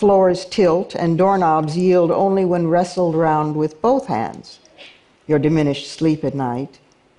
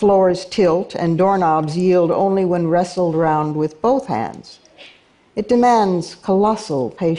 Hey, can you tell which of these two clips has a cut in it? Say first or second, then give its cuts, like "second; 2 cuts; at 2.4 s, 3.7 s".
first; 1 cut; at 5.2 s